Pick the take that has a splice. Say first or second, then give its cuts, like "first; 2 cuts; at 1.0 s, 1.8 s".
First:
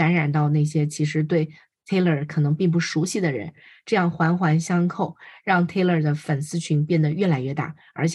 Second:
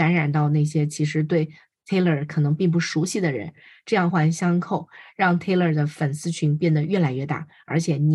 second; 1 cut; at 4.1 s